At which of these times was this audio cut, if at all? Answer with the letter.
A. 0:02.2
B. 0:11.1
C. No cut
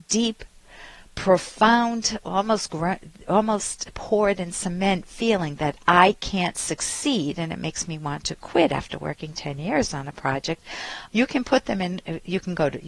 B